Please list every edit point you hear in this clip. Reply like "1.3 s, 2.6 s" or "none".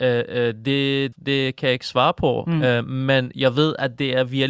1.1 s